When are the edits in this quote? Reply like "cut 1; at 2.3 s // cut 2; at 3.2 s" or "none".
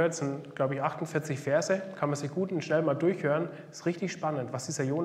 none

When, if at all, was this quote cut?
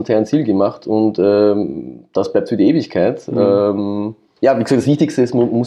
none

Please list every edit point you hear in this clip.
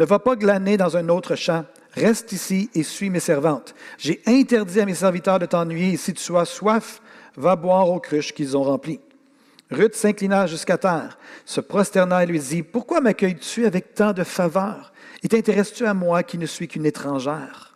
cut 1; at 4.0 s

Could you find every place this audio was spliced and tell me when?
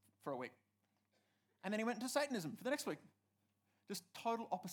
none

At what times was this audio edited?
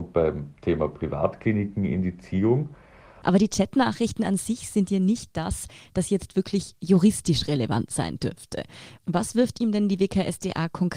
cut 1; at 3.2 s

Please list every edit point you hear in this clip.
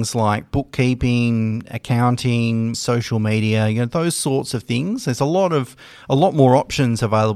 cut 1; at 2.7 s

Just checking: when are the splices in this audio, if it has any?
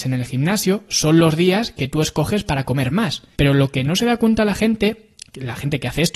cut 1; at 3.4 s

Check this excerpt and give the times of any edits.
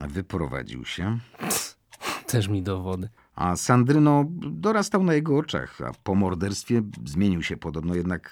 cut 1; at 3.2 s

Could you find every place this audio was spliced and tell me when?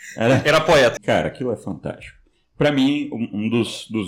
cut 1; at 1.0 s

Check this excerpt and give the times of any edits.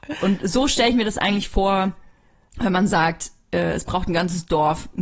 none

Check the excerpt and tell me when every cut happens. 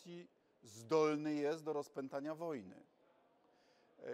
none

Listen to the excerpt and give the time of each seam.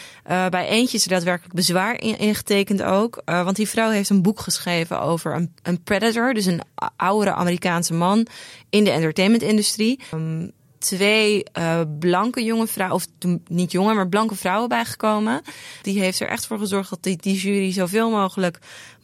cut 1; at 5.6 s // cut 2; at 10.1 s // cut 3; at 15.8 s

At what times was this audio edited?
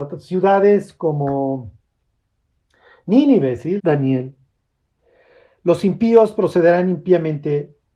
cut 1; at 3.8 s

